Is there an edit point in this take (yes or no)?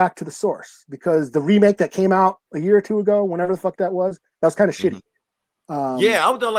yes